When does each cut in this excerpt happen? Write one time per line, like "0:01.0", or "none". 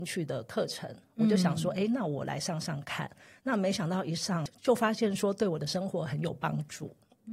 none

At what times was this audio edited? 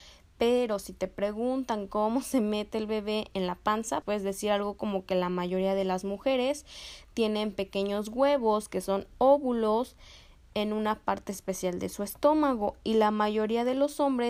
0:04.0

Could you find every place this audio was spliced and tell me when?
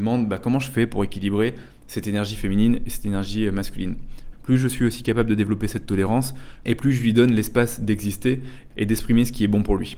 0:04.3
0:06.6

